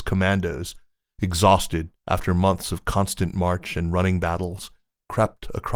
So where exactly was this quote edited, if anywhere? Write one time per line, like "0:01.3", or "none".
none